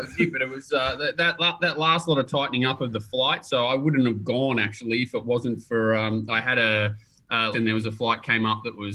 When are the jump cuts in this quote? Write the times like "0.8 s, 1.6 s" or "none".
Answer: 7.5 s